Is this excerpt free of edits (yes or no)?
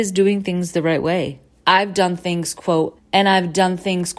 no